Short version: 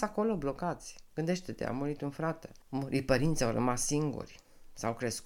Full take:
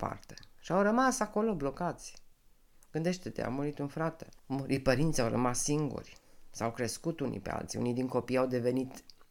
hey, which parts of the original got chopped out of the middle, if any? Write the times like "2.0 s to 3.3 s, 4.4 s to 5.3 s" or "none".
2.3 s to 2.8 s